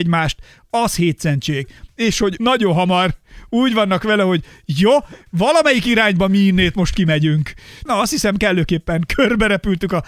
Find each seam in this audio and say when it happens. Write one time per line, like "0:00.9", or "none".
0:02.4
0:09.1